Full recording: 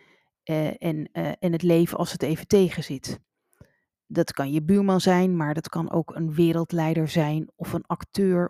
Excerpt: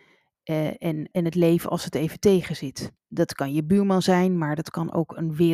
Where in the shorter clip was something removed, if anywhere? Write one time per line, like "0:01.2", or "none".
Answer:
0:01.1
0:03.0

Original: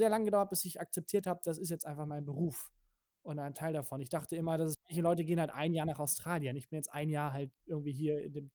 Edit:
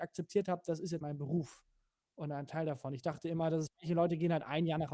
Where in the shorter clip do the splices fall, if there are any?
0:01.0

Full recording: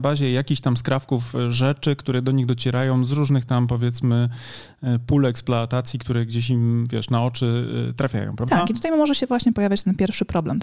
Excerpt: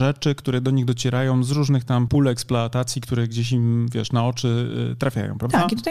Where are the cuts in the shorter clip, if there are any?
0:02.1

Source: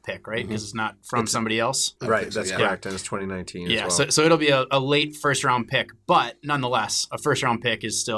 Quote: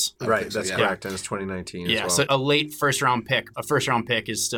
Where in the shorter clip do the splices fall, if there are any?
0:02.3
0:03.5

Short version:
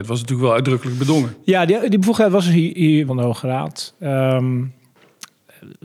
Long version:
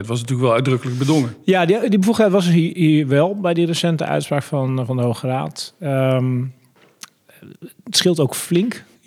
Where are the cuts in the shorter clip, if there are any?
0:03.1

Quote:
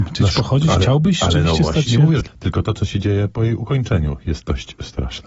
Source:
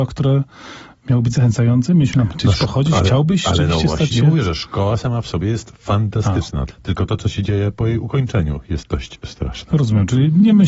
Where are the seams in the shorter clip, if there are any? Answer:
0:02.2

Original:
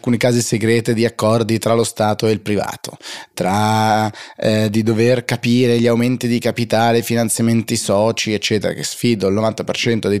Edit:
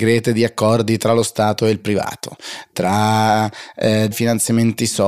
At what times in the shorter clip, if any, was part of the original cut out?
0:04.1

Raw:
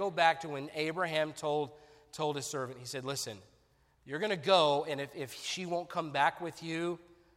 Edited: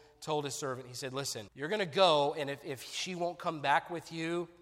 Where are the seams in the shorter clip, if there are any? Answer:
0:01.5

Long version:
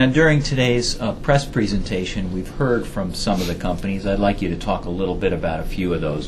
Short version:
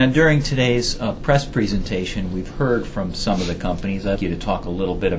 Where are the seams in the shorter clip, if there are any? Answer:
0:04.2

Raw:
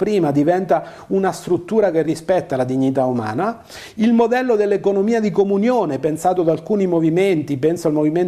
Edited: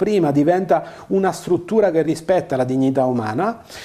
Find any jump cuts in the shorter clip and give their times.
none

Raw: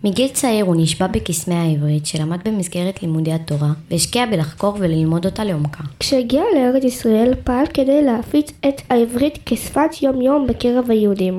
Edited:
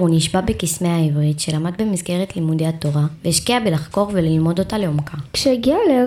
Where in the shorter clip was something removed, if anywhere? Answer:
none

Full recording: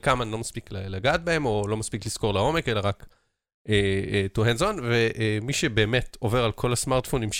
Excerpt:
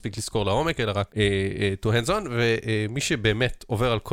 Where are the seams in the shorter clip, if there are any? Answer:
0:01.1

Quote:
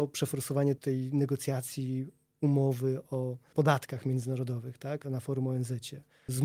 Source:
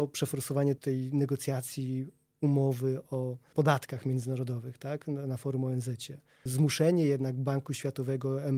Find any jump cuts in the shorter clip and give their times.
0:05.0

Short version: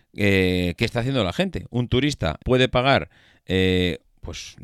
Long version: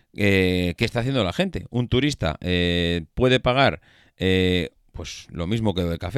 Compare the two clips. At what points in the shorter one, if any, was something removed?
0:02.4

